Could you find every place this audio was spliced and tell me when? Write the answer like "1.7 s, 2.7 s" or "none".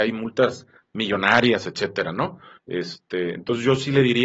2.6 s